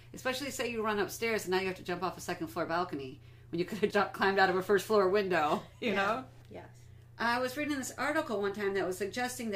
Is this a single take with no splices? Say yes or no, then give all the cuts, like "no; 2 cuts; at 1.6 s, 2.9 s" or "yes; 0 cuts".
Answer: no; 2 cuts; at 3.9 s, 6.4 s